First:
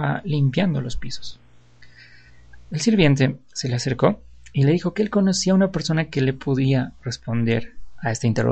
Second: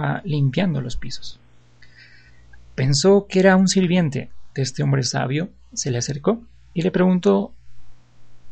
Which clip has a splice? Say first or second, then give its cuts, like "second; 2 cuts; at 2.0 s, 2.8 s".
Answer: first; 2 cuts; at 2.7 s, 7.0 s